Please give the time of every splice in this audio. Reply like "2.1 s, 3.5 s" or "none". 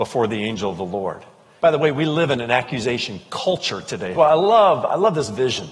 1.6 s, 4.1 s